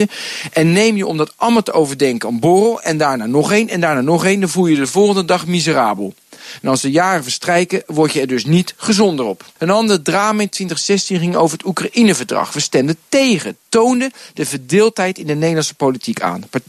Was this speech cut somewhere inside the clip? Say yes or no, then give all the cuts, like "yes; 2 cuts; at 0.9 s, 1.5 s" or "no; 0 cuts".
yes; 1 cut; at 9.6 s